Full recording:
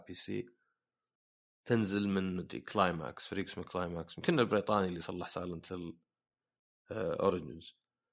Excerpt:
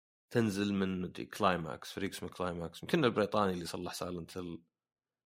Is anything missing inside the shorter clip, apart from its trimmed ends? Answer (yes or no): no